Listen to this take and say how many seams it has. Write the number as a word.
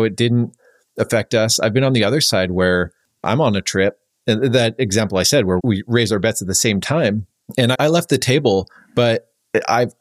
two